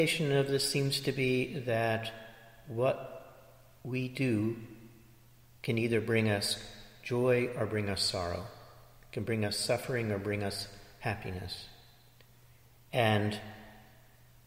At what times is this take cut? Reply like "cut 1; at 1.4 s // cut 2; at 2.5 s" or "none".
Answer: none